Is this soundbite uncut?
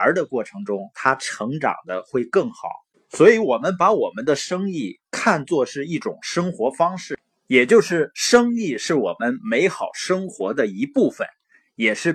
no; 1 cut; at 2.9 s

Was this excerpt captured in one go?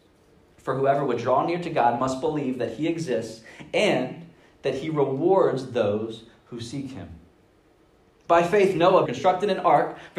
no; 1 cut; at 9.1 s

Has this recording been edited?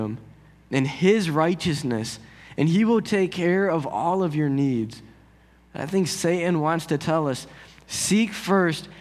no; 0 cuts

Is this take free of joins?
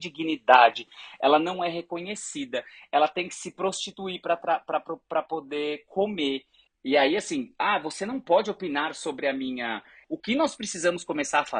no; 2 cuts; at 6.7 s, 10.0 s

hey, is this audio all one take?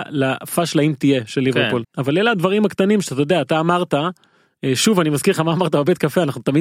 no; 1 cut; at 1.8 s

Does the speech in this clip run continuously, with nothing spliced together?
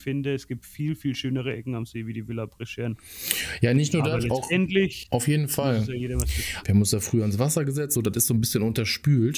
no; 2 cuts; at 6.6 s, 7.9 s

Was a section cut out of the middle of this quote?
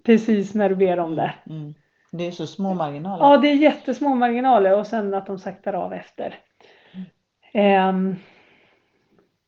no; 0 cuts

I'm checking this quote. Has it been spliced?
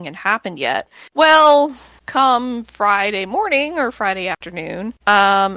no; 0 cuts

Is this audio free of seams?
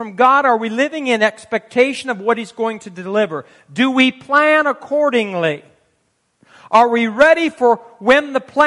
yes; 0 cuts

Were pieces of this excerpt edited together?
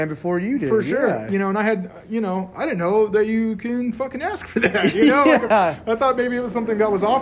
no; 0 cuts

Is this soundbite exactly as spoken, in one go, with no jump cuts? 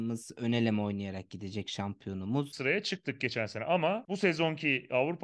no; 1 cut; at 2.5 s

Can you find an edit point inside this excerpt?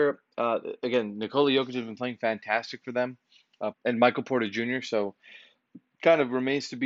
yes; 1 cut; at 3.7 s

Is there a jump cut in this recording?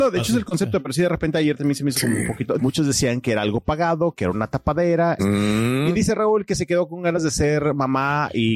yes; 2 cuts; at 2.6 s, 5.2 s

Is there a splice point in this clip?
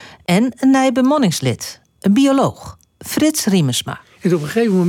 no; 0 cuts

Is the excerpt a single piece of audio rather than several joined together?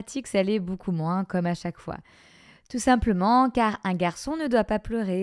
yes; 0 cuts

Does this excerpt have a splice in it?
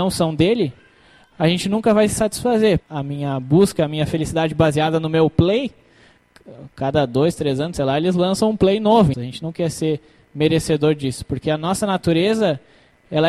yes; 2 cuts; at 2.8 s, 9.1 s

